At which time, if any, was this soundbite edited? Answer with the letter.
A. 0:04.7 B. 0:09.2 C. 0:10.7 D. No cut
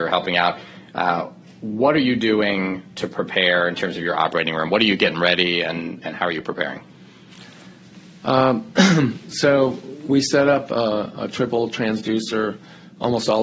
D